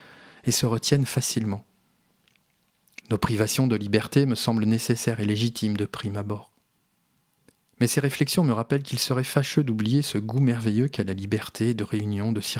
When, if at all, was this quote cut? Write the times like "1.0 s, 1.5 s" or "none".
3.0 s